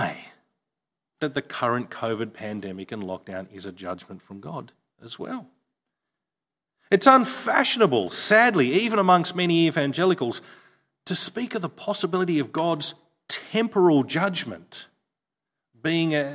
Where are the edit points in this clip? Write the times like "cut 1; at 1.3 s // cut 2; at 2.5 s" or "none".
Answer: none

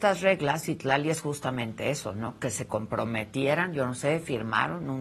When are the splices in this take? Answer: none

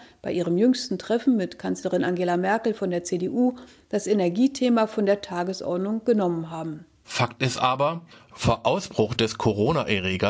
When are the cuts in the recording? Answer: cut 1; at 7.0 s

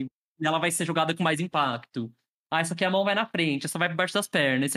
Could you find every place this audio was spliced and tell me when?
none

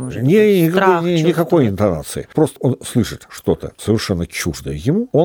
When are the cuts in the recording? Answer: none

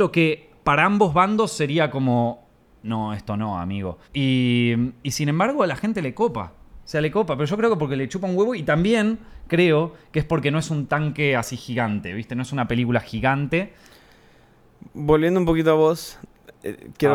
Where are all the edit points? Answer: cut 1; at 4.0 s

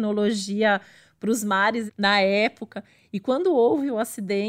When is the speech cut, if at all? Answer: cut 1; at 1.9 s

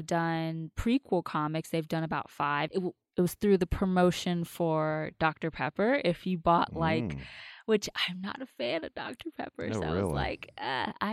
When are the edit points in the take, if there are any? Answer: cut 1; at 2.7 s

